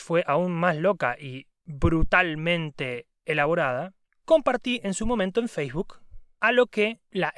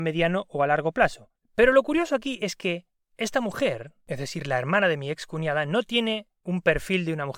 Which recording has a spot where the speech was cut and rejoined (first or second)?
second